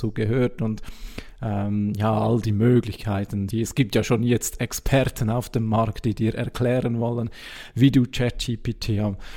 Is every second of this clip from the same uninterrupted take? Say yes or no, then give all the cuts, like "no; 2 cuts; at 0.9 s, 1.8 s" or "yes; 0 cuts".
no; 1 cut; at 3.5 s